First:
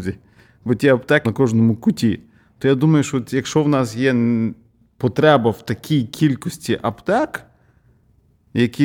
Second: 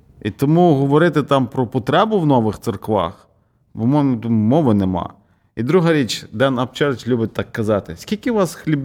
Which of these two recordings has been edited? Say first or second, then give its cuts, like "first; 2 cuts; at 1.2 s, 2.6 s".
first; 1 cut; at 1.2 s